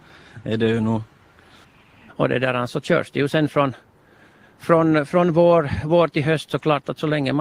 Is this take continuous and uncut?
no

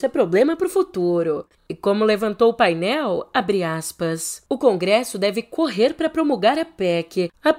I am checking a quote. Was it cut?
no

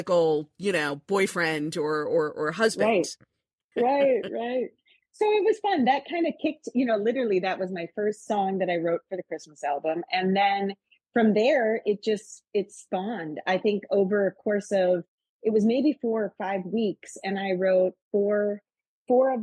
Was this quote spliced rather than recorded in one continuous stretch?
yes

